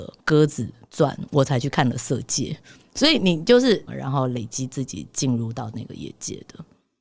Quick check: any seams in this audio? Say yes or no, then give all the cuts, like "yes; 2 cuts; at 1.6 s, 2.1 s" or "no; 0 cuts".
yes; 1 cut; at 3.9 s